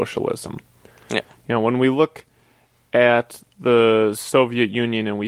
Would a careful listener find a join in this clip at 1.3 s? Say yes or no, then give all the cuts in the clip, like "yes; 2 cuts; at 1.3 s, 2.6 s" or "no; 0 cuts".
no; 0 cuts